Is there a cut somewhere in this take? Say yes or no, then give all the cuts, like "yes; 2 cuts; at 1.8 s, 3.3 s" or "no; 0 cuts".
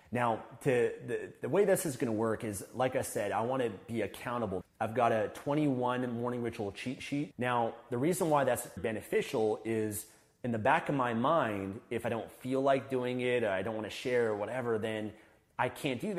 yes; 3 cuts; at 4.6 s, 7.3 s, 8.8 s